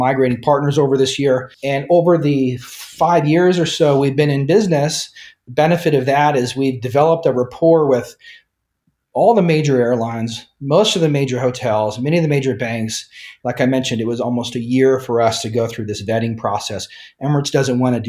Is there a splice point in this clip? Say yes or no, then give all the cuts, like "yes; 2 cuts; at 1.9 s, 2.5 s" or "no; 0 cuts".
yes; 2 cuts; at 1.5 s, 13.4 s